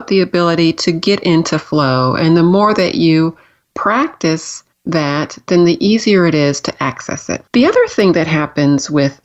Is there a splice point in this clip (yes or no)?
yes